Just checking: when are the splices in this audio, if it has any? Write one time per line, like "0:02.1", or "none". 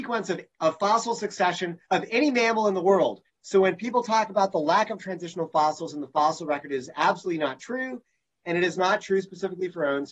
0:01.8
0:03.3